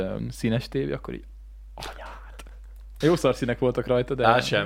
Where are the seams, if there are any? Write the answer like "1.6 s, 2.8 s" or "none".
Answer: 3.0 s